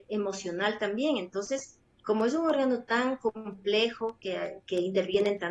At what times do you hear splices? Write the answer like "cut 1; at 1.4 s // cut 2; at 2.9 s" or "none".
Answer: cut 1; at 2.0 s